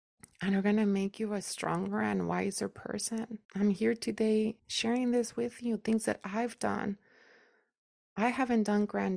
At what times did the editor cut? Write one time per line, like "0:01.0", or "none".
0:03.4
0:04.6